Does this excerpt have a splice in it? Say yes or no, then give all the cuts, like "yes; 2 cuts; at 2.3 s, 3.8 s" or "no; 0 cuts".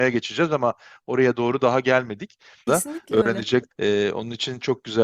yes; 2 cuts; at 2.7 s, 3.7 s